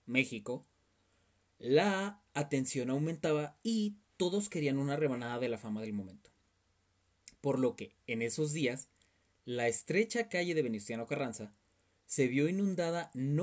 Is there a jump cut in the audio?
no; 0 cuts

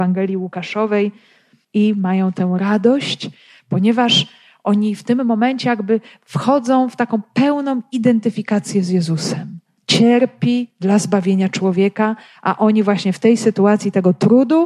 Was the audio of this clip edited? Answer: yes; 2 cuts; at 1.6 s, 9.8 s

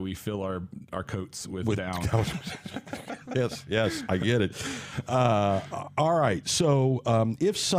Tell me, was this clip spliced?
no; 0 cuts

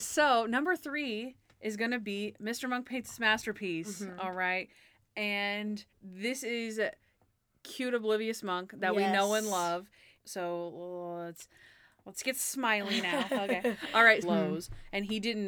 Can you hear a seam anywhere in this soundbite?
yes; 3 cuts; at 5.9 s, 10.2 s, 14.2 s

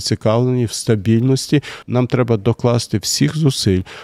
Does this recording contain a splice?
yes; 1 cut; at 1.8 s

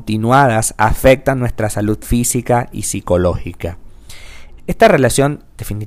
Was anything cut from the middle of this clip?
yes; 1 cut; at 4.6 s

